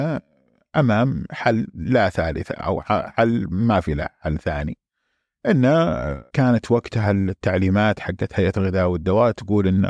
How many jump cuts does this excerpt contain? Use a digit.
1